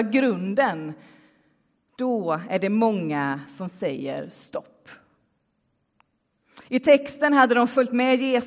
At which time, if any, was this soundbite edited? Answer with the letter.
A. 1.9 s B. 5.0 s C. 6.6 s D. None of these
D